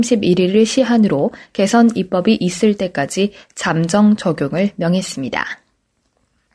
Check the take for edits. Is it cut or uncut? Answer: uncut